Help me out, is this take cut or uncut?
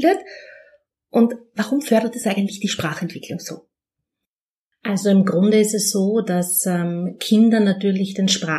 uncut